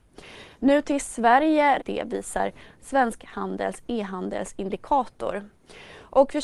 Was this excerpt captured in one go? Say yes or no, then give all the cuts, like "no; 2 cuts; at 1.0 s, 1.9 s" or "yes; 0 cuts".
no; 1 cut; at 1.8 s